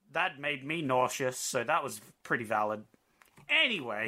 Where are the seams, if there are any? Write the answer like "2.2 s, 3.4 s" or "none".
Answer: none